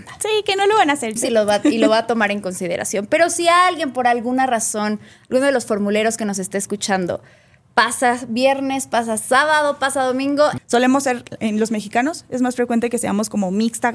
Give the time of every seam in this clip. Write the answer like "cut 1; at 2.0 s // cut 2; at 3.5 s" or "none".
cut 1; at 1.2 s // cut 2; at 10.6 s

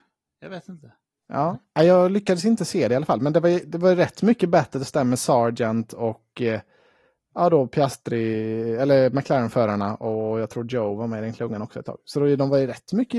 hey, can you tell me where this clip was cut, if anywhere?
none

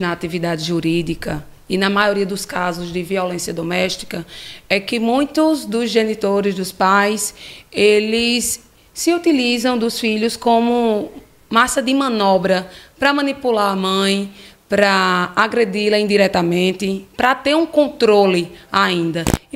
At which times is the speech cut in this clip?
none

